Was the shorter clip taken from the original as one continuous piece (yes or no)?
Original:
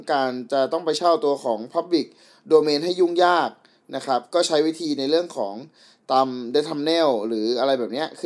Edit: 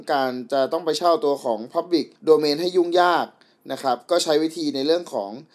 no